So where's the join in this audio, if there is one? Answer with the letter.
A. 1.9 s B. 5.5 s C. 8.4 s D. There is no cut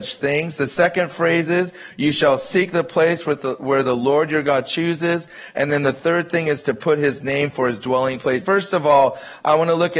C